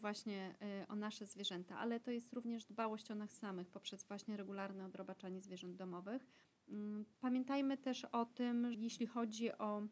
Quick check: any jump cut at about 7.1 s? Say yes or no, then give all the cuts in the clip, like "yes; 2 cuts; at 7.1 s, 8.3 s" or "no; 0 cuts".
yes; 2 cuts; at 7.1 s, 8.7 s